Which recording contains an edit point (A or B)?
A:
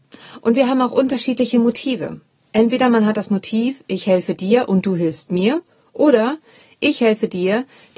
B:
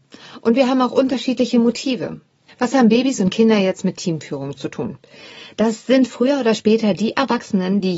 B